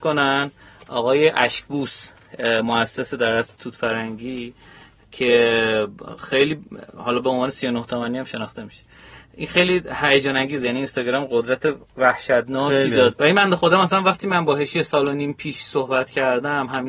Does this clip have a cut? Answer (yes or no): yes